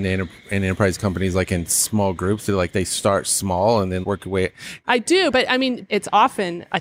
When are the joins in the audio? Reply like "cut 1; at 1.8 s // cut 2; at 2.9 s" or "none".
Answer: cut 1; at 4.0 s // cut 2; at 5.3 s